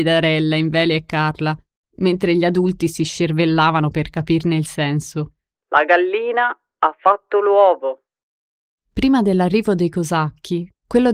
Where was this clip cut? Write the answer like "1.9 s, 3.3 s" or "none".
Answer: 5.5 s, 8.8 s